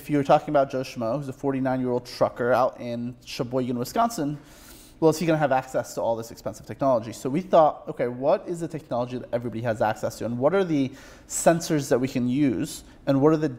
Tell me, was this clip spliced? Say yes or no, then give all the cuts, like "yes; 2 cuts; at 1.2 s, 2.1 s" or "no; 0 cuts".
no; 0 cuts